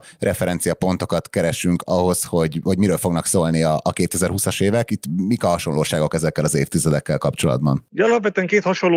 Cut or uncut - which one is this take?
uncut